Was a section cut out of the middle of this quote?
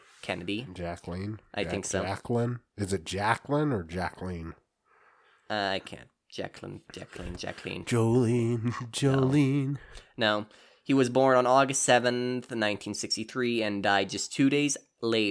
no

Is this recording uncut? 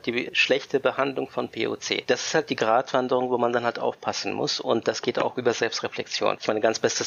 yes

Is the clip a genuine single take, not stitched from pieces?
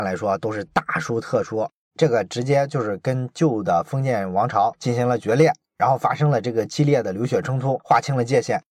no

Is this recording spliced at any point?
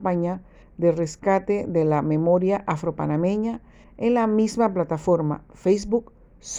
no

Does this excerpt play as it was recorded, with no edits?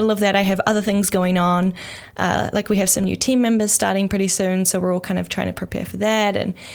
yes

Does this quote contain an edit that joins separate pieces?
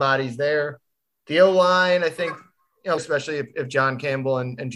yes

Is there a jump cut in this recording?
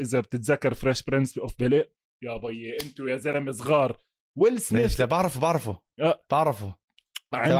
no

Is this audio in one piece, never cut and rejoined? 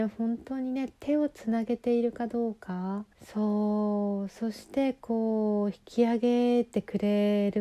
no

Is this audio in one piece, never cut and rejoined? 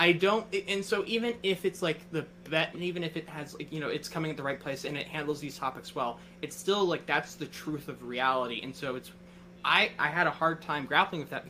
no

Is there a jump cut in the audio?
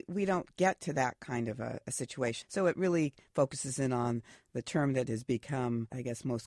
yes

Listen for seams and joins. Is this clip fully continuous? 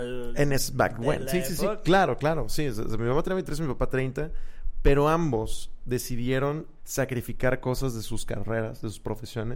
no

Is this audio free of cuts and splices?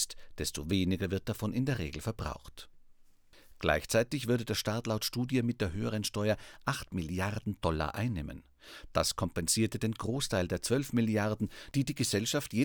yes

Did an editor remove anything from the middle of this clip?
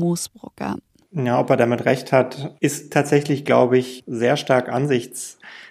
yes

